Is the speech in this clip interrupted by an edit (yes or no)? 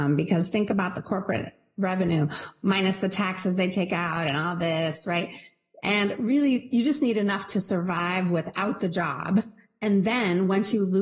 no